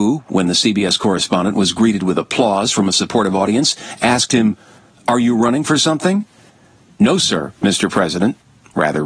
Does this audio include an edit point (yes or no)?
no